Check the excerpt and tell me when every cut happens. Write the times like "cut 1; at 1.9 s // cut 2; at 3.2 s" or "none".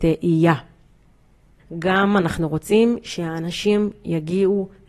cut 1; at 1.6 s